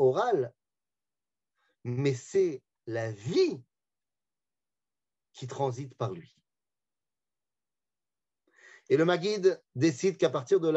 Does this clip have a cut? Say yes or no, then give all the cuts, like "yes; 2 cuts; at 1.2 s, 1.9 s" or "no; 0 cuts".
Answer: no; 0 cuts